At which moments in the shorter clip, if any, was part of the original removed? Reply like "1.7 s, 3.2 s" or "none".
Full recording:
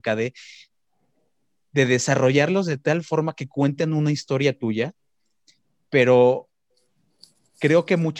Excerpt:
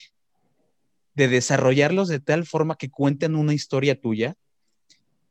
none